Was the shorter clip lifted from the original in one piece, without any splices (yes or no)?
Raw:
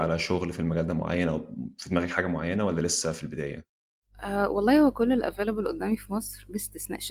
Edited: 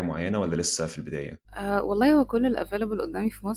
no